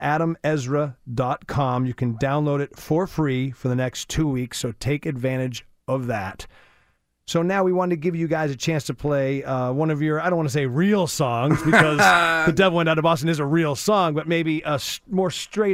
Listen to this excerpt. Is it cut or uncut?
uncut